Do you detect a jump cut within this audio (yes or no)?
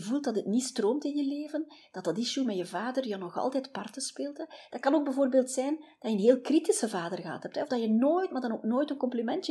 no